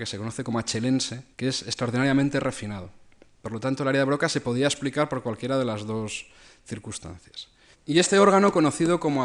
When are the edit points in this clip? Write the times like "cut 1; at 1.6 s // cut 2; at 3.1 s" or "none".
cut 1; at 1.3 s // cut 2; at 7.7 s